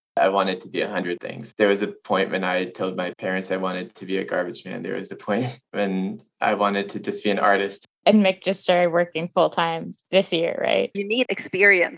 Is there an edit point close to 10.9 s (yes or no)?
yes